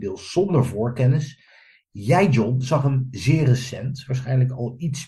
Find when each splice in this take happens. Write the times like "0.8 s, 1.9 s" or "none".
none